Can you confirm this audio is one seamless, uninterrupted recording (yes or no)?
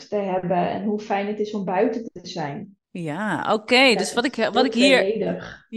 no